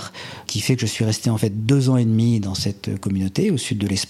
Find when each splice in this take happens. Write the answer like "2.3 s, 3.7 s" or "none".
none